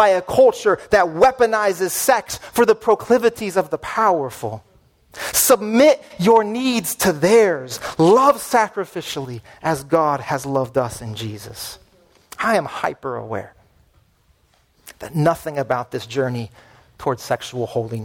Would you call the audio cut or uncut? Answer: uncut